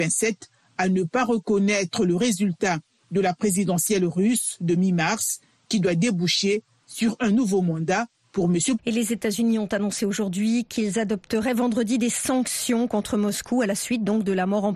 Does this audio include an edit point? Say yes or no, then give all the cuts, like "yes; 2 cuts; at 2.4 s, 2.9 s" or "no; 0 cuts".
yes; 1 cut; at 8.8 s